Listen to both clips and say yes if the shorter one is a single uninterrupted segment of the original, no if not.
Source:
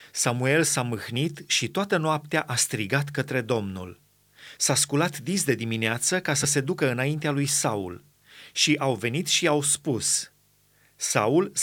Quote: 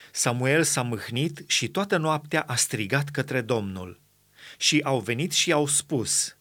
no